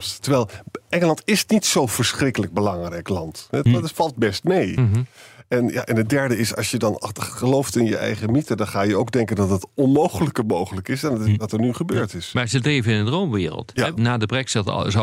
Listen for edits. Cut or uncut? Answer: cut